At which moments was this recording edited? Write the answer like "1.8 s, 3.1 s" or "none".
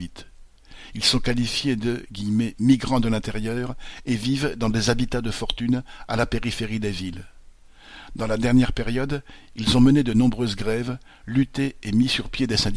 none